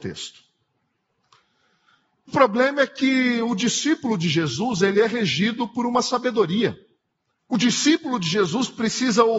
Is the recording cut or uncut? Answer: cut